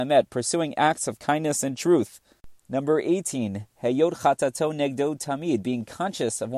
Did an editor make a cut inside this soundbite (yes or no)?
no